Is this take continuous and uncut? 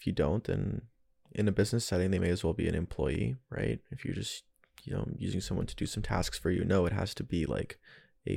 yes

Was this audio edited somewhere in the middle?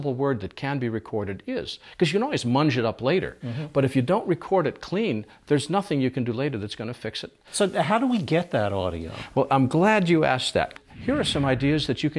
no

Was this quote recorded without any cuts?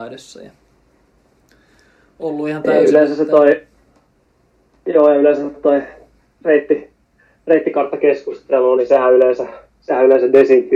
yes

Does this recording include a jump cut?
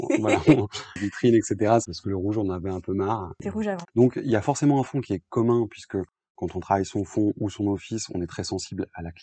yes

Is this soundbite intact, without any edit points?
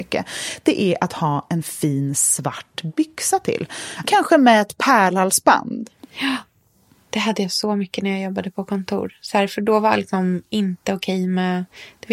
no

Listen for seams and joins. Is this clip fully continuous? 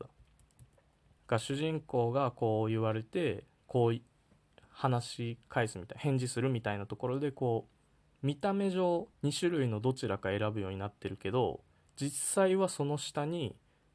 no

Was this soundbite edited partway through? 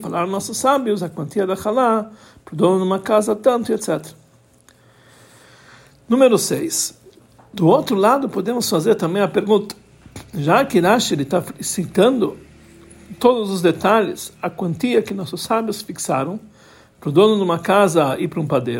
no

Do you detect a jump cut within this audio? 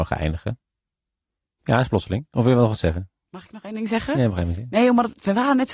no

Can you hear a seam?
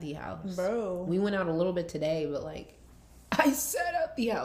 no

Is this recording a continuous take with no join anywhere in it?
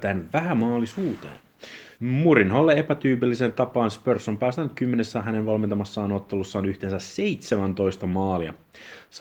no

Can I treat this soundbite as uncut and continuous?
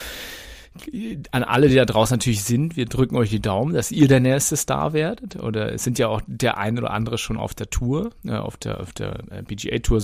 yes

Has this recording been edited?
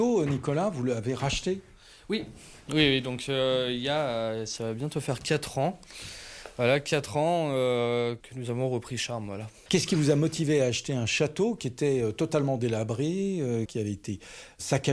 yes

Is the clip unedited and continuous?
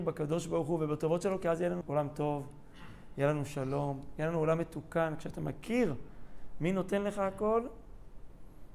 no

